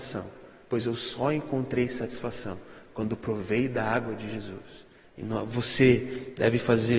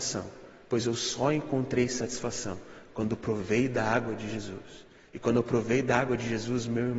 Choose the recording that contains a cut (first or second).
first